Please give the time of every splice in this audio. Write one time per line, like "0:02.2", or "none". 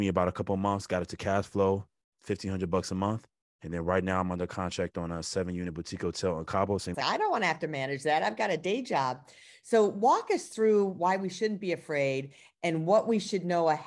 0:02.1
0:03.4
0:06.9